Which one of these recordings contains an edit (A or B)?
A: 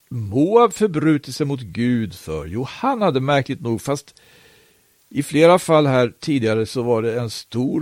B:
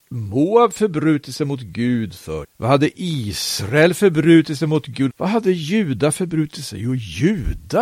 B